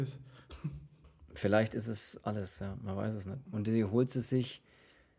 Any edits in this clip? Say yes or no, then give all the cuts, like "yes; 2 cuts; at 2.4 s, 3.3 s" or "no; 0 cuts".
yes; 1 cut; at 3.5 s